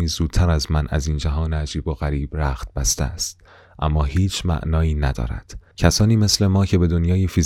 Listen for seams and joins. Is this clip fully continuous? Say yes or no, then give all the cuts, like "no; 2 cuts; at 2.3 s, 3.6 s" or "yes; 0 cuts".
yes; 0 cuts